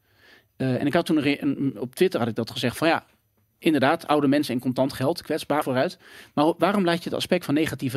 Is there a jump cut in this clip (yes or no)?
yes